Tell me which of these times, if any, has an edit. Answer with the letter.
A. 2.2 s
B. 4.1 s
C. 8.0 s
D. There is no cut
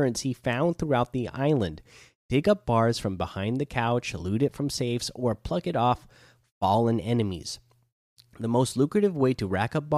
D